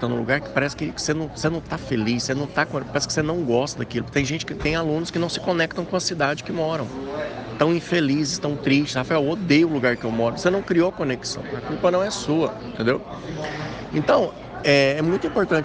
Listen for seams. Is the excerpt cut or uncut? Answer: uncut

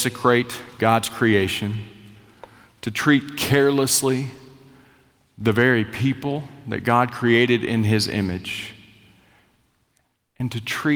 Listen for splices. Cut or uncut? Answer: uncut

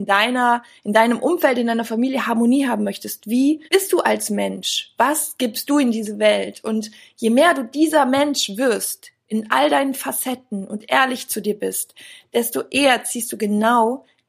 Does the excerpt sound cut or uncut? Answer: cut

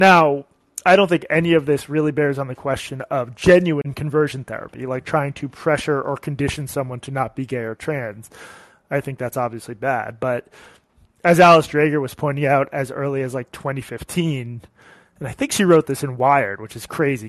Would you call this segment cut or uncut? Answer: uncut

